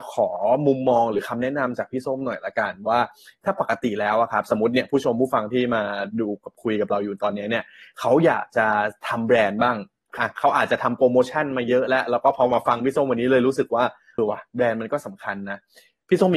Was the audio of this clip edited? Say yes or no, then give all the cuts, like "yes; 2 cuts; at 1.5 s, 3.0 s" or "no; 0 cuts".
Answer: yes; 2 cuts; at 10.2 s, 14.2 s